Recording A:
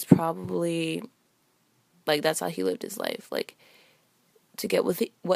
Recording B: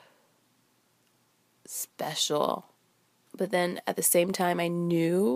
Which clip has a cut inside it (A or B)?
B